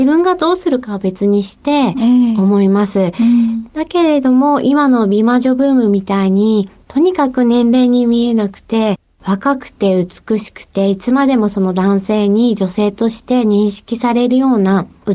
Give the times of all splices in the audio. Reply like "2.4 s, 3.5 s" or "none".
none